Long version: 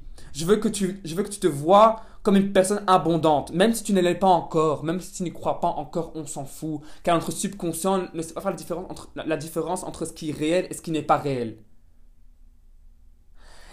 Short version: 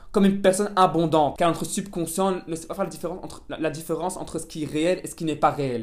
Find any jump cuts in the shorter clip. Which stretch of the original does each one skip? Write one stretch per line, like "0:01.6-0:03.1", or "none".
0:03.5-0:07.0